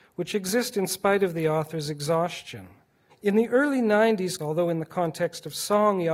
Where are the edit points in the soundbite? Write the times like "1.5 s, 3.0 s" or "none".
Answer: 3.1 s, 4.4 s